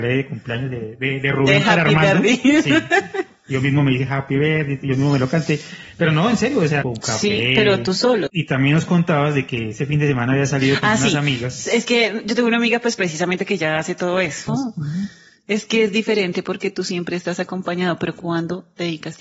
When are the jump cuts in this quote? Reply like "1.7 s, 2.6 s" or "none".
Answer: 6.8 s, 8.3 s, 14.5 s